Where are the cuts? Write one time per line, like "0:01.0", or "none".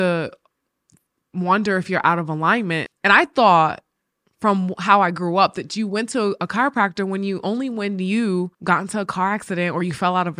0:02.9
0:08.5